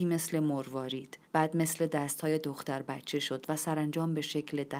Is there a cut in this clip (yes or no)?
yes